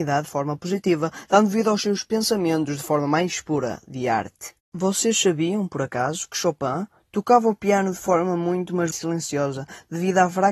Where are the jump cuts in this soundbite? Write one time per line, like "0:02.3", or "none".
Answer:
0:08.9